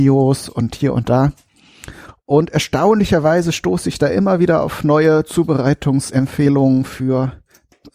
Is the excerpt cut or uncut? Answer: uncut